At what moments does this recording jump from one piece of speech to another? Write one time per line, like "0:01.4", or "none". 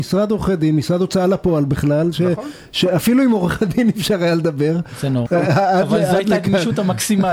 0:05.3